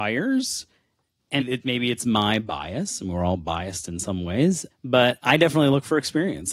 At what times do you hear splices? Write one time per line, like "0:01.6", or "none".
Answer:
0:01.4
0:04.7